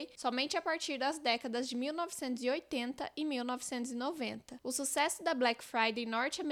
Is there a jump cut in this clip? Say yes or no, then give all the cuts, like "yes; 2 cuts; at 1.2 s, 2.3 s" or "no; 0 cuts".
yes; 1 cut; at 4.6 s